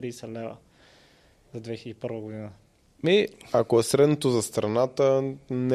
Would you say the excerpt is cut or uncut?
uncut